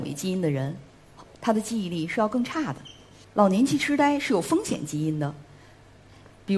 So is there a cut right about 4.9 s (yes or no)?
no